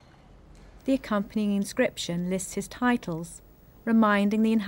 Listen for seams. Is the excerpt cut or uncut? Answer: uncut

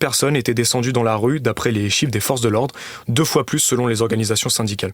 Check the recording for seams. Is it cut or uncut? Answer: uncut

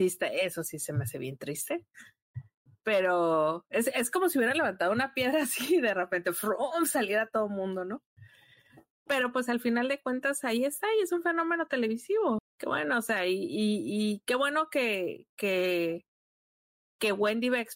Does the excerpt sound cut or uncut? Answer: cut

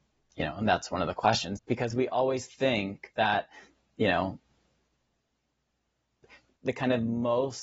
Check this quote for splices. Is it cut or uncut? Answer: cut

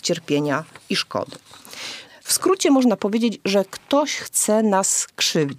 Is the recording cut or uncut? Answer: cut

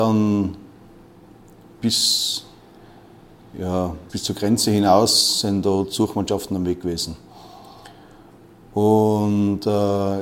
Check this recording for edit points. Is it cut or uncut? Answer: cut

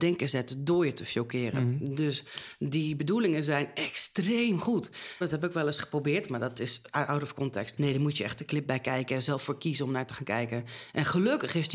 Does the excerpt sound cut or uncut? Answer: cut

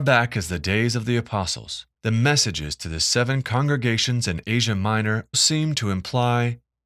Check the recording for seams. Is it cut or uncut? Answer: cut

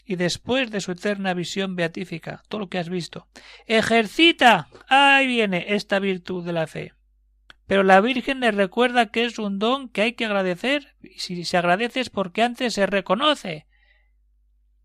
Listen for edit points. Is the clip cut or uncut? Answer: cut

